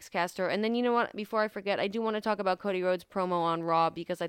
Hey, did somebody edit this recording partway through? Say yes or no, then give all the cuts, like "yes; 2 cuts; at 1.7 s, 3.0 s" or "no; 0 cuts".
no; 0 cuts